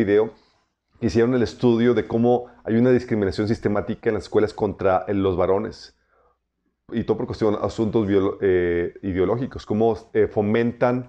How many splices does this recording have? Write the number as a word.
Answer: zero